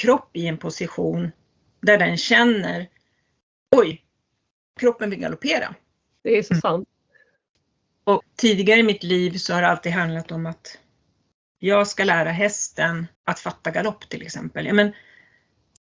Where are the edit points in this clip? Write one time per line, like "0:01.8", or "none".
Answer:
0:06.2
0:08.2
0:13.2

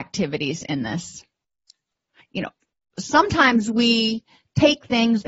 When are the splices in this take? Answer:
0:02.2

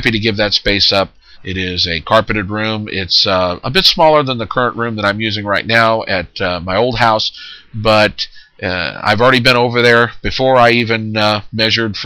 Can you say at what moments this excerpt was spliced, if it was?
0:01.3

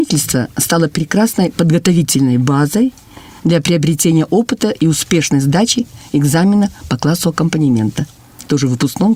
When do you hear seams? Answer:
none

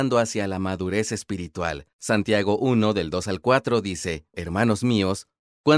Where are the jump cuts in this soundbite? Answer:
0:04.3

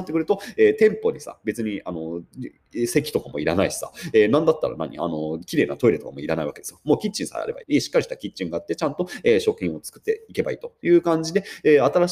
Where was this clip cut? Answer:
0:07.6

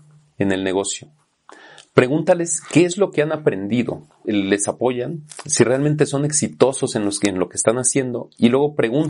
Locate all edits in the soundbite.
0:04.2

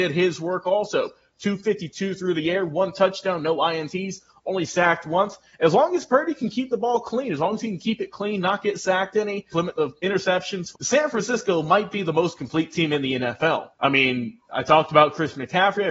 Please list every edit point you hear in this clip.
0:09.5
0:10.7
0:13.7

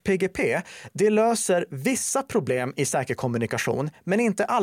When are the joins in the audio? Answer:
none

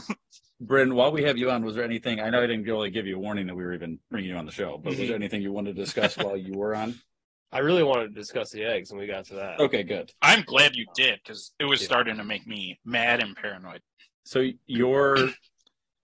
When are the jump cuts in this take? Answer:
0:14.1

